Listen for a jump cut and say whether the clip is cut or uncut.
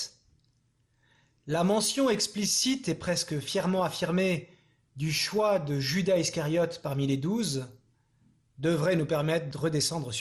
uncut